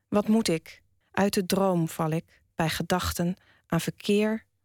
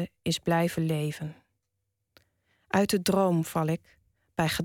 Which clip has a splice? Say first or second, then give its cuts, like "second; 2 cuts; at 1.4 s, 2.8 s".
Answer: first; 2 cuts; at 1.0 s, 2.5 s